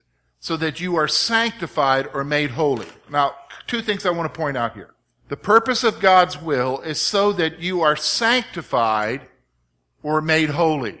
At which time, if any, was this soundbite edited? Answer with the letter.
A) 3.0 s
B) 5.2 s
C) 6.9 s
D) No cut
B